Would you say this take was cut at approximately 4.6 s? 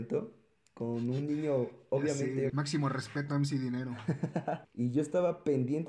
yes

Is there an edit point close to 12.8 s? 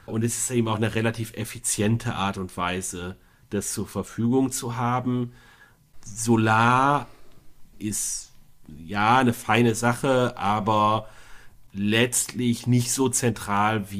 no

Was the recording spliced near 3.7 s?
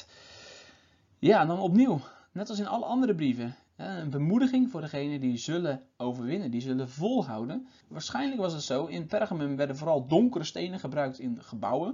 yes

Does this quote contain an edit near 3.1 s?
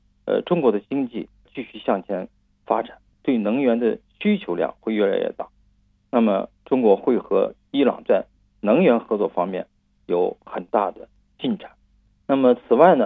yes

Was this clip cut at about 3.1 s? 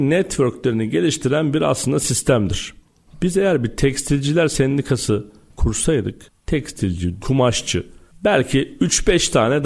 yes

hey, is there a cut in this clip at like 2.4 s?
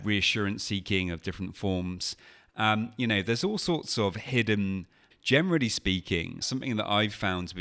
no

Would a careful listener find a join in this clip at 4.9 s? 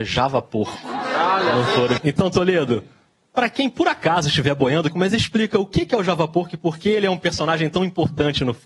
yes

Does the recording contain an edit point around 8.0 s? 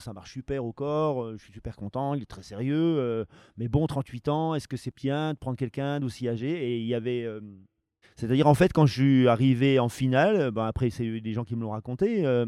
yes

